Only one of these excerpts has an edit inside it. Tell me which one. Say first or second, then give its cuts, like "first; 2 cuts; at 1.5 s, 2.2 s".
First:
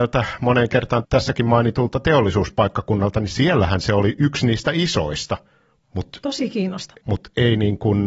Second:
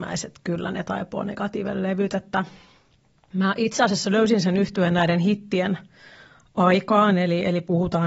first; 2 cuts; at 1.0 s, 7.0 s